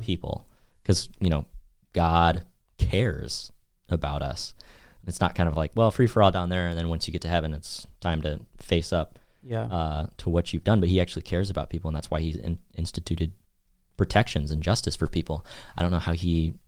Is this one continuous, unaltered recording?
yes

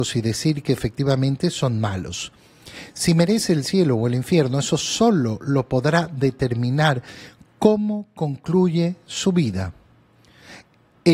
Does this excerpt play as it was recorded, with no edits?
yes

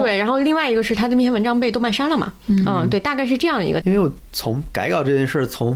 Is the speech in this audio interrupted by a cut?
yes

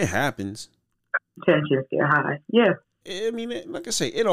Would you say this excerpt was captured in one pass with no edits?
no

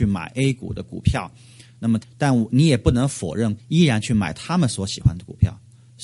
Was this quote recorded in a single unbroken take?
no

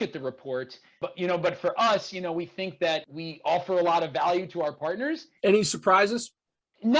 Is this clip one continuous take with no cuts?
no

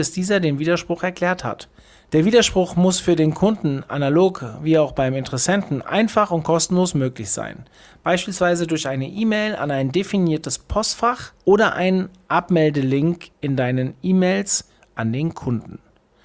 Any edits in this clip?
yes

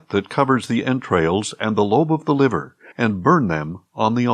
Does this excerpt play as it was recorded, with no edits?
no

